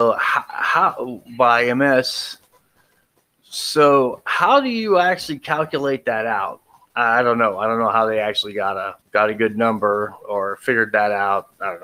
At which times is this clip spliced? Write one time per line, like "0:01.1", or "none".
0:09.0